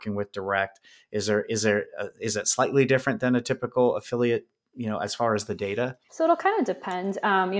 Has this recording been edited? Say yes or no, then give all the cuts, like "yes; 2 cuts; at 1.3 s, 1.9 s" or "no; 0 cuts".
no; 0 cuts